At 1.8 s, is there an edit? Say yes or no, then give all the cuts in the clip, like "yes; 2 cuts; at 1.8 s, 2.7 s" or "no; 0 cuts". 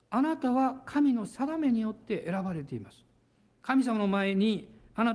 no; 1 cut; at 3.5 s